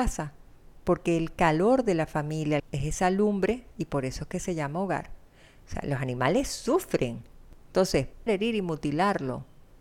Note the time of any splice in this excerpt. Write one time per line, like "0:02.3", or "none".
0:02.6
0:05.6
0:08.3